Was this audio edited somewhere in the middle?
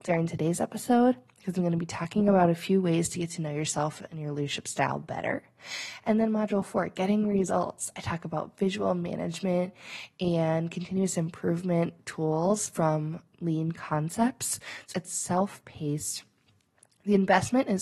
yes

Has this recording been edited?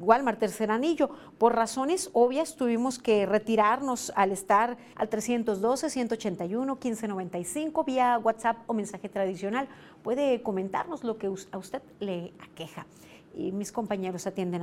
yes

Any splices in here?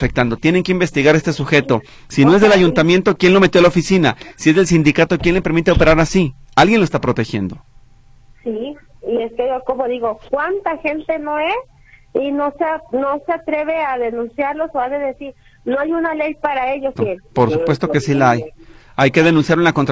yes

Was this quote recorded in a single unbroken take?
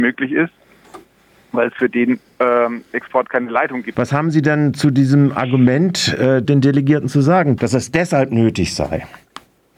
no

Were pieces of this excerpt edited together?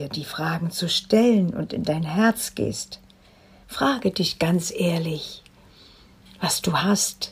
no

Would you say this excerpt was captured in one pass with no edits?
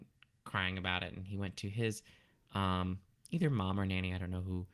yes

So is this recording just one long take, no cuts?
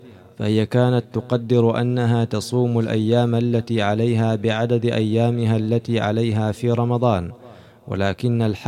yes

